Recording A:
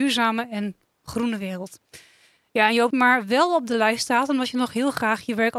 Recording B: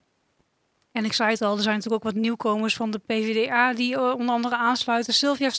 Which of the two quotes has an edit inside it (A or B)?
A